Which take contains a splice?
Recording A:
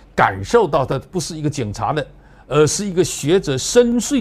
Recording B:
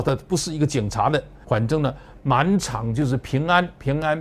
B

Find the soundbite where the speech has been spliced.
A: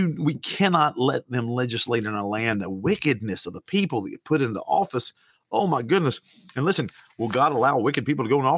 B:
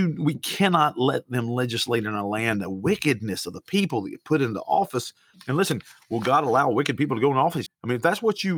B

